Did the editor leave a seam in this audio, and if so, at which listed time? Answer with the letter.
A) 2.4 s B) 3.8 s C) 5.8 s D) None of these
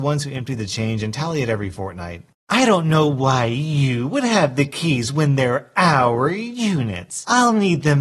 A